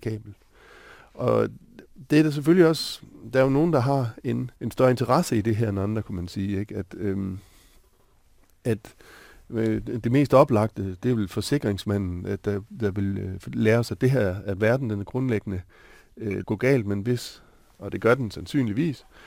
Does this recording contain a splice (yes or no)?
yes